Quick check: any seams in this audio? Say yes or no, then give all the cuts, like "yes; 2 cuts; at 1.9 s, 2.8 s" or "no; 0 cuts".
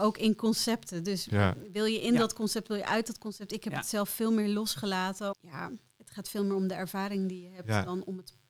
yes; 1 cut; at 5.3 s